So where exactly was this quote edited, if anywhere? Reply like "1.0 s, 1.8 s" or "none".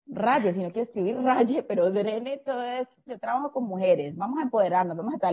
3.1 s